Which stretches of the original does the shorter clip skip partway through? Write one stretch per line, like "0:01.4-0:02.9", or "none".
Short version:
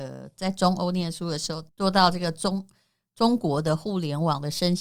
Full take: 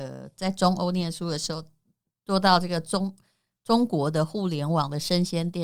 0:01.7-0:02.2